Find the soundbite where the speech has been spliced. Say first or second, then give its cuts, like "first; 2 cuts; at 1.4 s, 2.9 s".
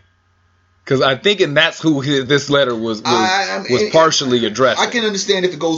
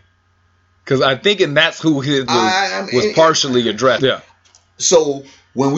second; 2 cuts; at 2.3 s, 4.0 s